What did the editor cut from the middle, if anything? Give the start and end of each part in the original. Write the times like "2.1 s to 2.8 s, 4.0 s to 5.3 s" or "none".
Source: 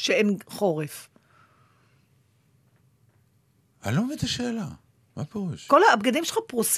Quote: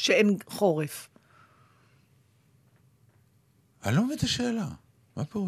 none